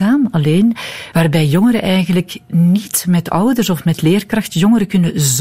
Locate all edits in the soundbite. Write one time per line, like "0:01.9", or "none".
0:01.1